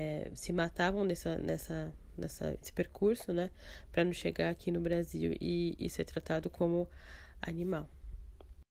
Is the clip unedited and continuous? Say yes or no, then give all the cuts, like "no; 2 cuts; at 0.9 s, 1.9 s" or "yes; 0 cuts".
yes; 0 cuts